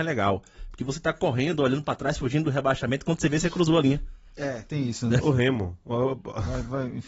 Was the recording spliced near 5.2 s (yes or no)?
yes